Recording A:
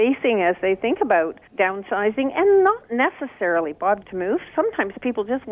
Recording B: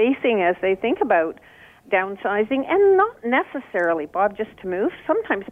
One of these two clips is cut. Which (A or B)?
A